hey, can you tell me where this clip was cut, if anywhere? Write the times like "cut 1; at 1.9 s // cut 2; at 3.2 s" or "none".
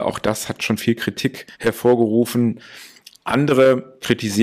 cut 1; at 1.5 s